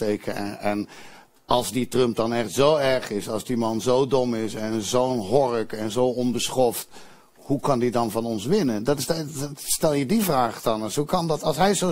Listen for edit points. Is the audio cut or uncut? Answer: uncut